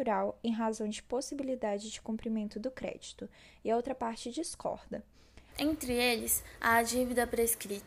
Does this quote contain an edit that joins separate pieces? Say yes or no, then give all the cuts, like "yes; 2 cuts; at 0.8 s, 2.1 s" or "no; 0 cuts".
yes; 1 cut; at 5.5 s